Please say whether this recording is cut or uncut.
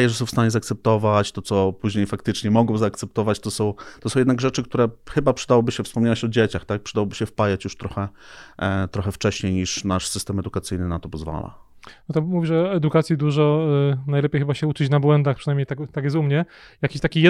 uncut